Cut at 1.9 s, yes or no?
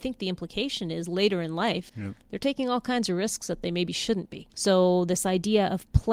yes